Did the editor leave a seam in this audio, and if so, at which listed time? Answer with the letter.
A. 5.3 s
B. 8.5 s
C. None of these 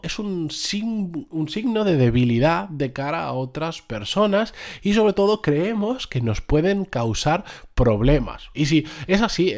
B